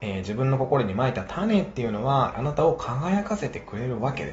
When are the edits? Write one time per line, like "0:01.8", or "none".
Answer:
0:02.3